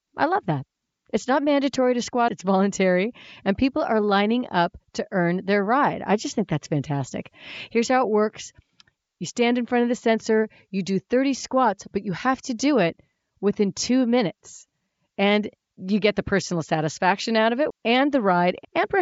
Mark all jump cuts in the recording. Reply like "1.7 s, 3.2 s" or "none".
2.3 s, 17.7 s